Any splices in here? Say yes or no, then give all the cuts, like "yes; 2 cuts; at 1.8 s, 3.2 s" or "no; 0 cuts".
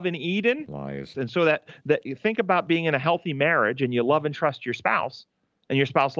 yes; 1 cut; at 1.1 s